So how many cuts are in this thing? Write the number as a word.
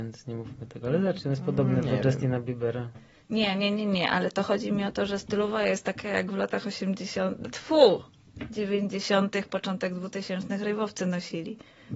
one